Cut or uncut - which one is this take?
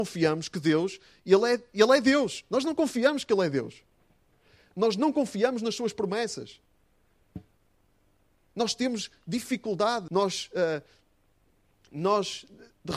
cut